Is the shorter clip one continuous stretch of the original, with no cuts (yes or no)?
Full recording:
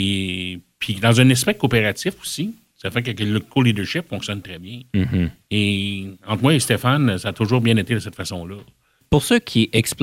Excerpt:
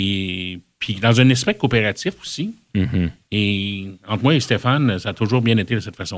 no